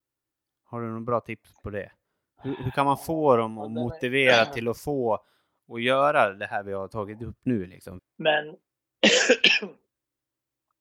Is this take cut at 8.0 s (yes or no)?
yes